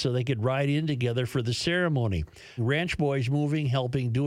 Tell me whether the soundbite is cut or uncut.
cut